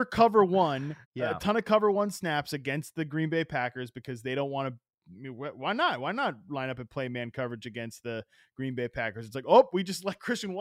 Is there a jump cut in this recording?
yes; 1 cut; at 1.0 s

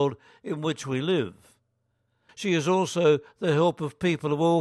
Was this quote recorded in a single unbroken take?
no; 1 cut; at 2.3 s

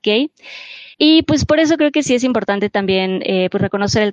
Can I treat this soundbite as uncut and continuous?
no; 1 cut; at 0.9 s

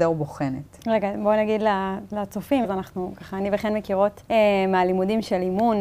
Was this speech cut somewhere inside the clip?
yes; 2 cuts; at 2.6 s, 4.2 s

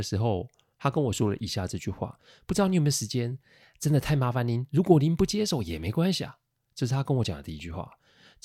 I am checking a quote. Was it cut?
no; 0 cuts

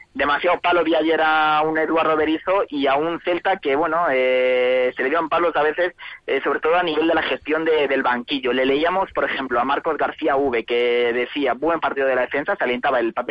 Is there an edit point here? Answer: no; 0 cuts

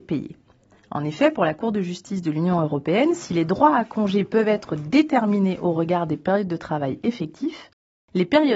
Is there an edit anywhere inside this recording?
no; 0 cuts

